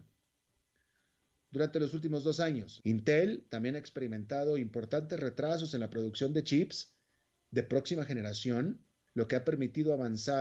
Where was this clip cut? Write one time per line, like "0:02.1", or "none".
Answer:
0:02.8